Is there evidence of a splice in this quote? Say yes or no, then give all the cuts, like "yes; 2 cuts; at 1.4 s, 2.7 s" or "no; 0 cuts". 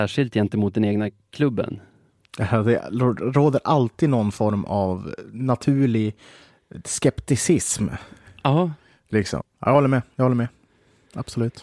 yes; 1 cut; at 9.4 s